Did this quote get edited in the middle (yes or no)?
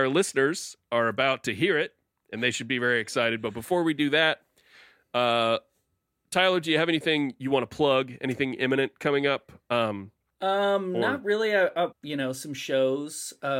yes